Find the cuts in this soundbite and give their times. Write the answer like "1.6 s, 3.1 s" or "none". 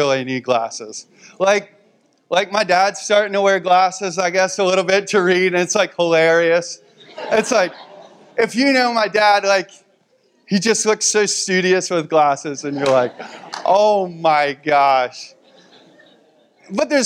none